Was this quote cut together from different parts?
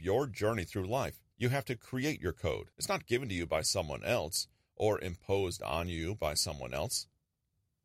yes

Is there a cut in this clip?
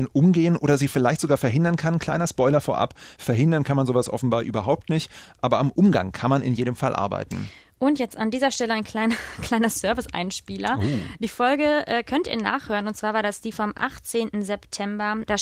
no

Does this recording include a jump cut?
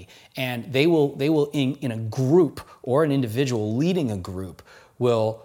no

